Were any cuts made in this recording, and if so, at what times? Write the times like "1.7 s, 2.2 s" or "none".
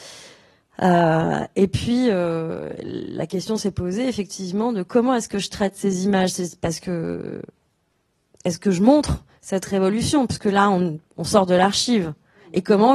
none